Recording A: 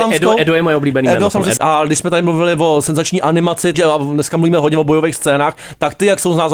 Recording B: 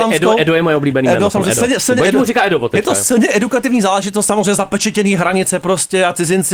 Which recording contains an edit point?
A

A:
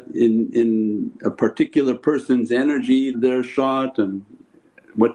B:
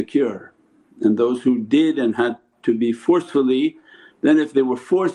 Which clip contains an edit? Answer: A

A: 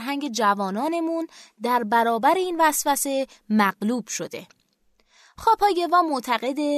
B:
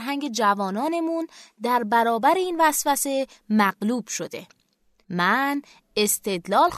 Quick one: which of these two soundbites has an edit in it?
B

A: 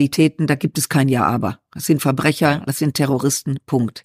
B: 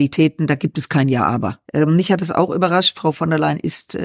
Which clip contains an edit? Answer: B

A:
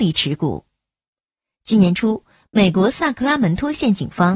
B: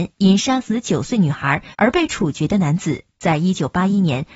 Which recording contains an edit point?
A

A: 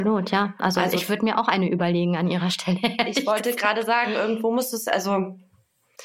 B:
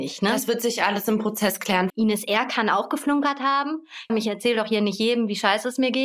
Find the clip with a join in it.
B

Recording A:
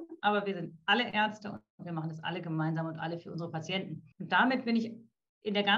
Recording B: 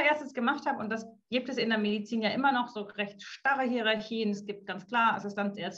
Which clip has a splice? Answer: A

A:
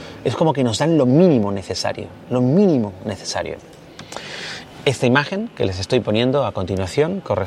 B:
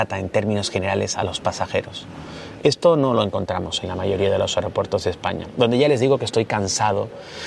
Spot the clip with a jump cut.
B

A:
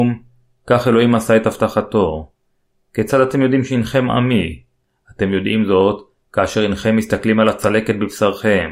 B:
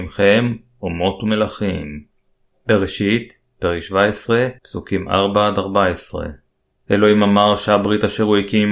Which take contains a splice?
B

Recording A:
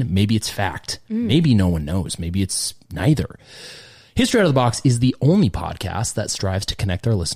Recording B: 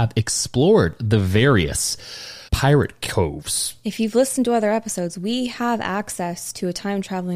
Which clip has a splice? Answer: B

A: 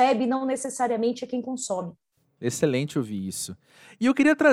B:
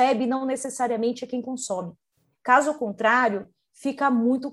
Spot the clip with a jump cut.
B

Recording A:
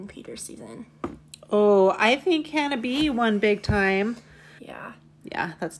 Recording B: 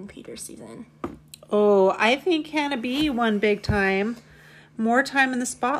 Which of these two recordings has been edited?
A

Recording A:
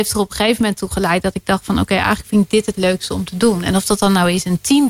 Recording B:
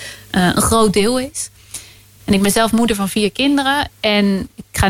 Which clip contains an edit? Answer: B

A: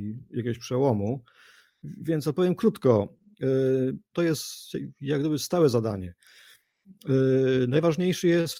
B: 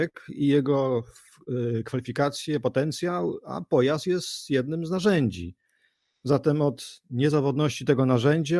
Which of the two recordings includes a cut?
A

